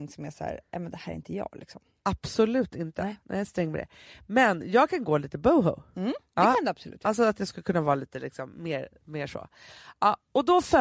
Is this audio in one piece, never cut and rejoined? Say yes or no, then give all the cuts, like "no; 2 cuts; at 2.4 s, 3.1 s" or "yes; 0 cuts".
yes; 0 cuts